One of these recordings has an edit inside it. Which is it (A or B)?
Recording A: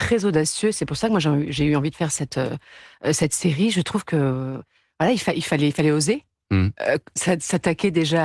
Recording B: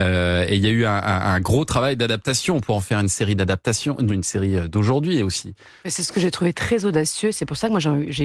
B